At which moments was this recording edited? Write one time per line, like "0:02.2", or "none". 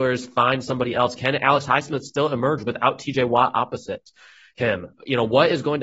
none